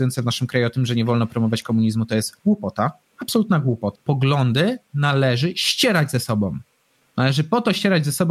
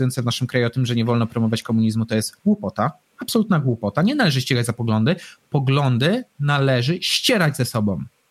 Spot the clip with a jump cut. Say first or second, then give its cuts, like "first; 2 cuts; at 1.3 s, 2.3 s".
first; 1 cut; at 3.9 s